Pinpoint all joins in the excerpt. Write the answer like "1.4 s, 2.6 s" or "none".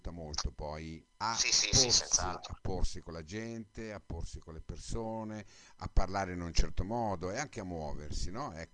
1.1 s

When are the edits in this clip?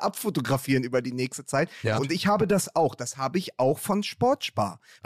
2.0 s

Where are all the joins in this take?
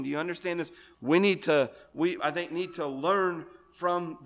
0.9 s, 2.2 s

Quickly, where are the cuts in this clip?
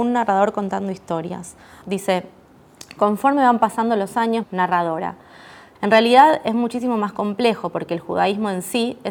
1.8 s, 4.4 s, 5.7 s

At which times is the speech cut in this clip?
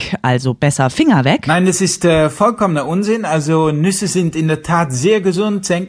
none

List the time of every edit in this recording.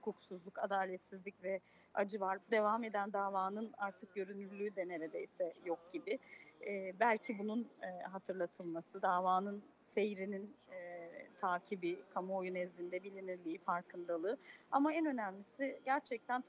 2.4 s

